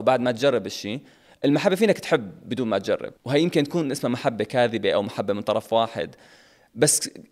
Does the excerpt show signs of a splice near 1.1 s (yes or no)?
no